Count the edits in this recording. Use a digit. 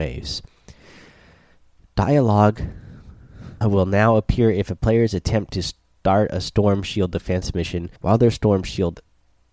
2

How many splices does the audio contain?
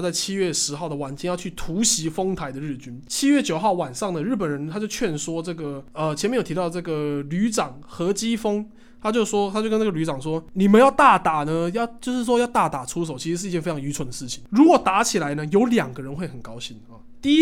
0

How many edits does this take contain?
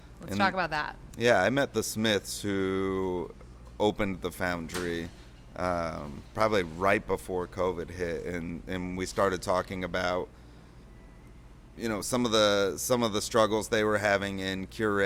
1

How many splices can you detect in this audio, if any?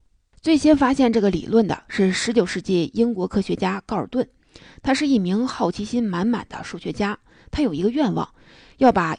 0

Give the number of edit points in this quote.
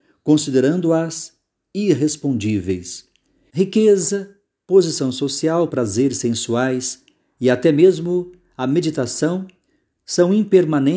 2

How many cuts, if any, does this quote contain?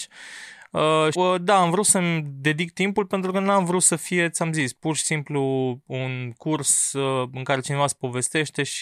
1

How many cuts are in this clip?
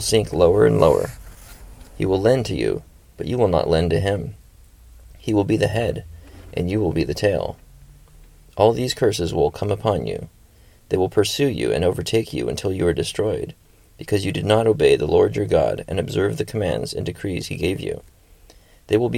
0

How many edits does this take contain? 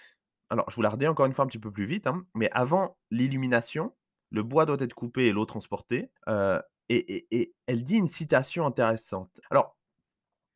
2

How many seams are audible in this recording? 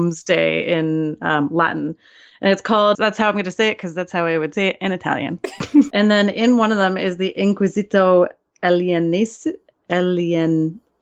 2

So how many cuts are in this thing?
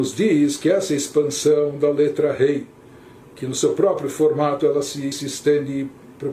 2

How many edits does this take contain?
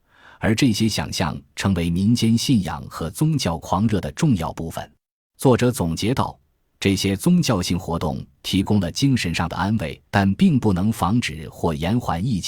2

